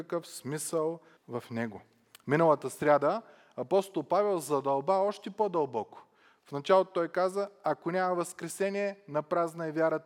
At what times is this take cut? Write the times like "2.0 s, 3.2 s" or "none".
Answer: 1.2 s

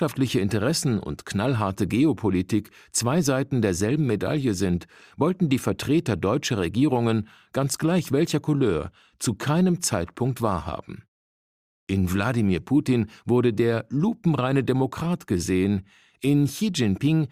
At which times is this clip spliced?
none

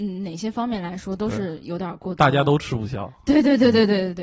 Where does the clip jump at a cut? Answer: none

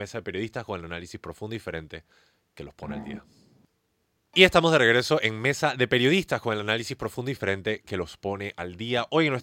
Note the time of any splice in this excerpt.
none

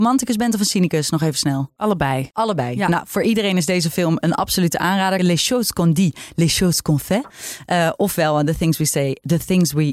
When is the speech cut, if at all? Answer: 5.2 s

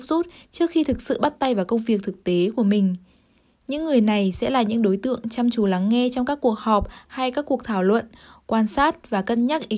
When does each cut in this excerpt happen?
none

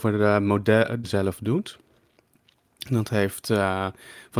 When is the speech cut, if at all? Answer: 1.0 s

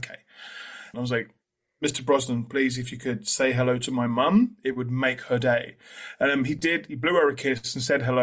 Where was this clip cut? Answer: 0.9 s

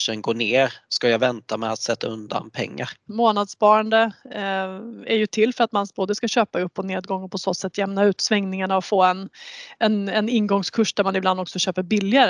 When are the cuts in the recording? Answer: 3.1 s

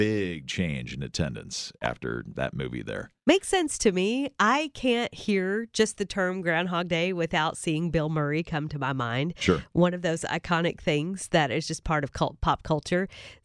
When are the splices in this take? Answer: none

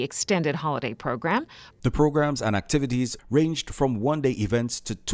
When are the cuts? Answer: 1.7 s, 3.2 s

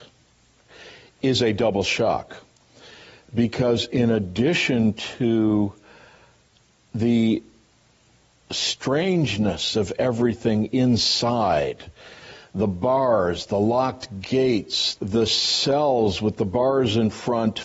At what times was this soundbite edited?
13.5 s, 15.0 s

